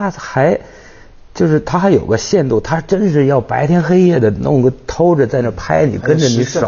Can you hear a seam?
no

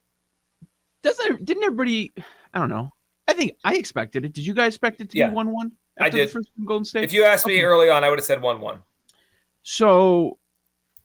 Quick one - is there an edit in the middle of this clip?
no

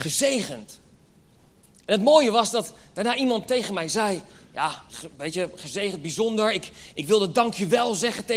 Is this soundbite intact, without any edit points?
no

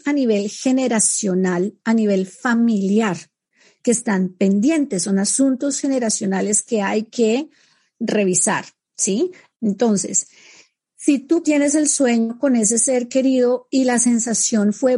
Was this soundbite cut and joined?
yes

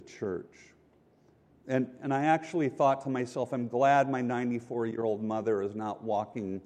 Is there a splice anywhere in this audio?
yes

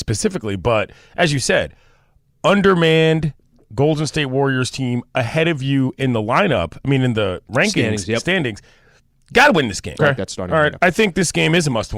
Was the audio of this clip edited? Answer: yes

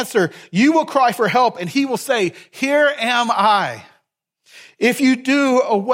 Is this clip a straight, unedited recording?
yes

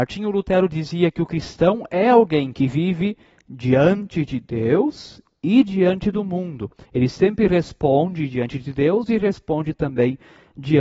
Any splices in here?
yes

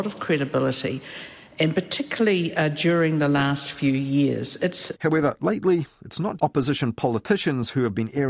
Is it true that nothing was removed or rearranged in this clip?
no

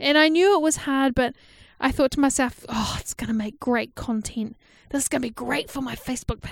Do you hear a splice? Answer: no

